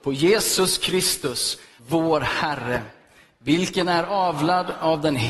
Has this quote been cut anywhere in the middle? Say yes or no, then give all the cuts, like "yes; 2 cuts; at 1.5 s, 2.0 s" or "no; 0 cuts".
yes; 1 cut; at 1.8 s